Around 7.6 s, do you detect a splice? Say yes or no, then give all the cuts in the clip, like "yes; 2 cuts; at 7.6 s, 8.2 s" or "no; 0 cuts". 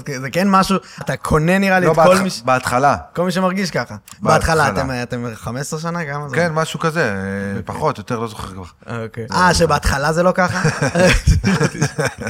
no; 2 cuts; at 1.0 s, 9.3 s